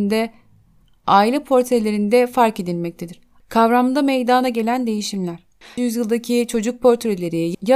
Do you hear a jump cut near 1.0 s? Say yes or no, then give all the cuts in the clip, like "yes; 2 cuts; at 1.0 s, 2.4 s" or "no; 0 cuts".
no; 2 cuts; at 3.4 s, 5.8 s